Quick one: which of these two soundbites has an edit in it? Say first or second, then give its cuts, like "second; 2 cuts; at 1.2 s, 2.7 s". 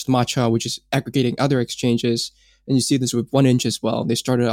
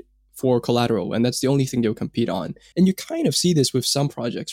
second; 1 cut; at 2.7 s